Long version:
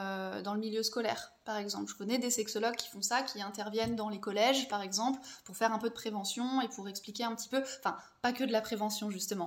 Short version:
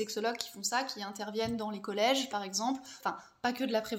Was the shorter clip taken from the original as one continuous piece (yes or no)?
no